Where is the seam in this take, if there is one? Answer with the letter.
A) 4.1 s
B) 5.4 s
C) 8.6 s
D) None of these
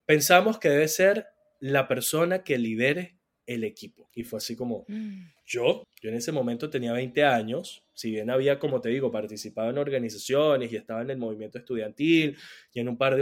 B